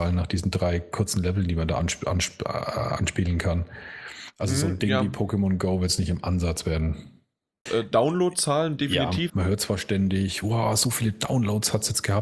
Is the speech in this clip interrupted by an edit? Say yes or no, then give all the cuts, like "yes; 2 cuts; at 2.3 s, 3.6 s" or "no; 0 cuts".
yes; 2 cuts; at 7.7 s, 9.3 s